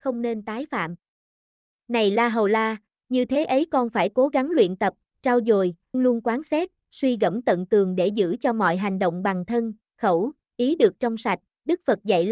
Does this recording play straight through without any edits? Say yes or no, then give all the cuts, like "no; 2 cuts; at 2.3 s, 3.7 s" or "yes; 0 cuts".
no; 1 cut; at 5.9 s